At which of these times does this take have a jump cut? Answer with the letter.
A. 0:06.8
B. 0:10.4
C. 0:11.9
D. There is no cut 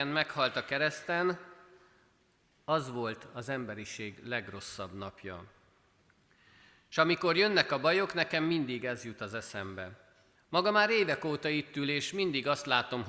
B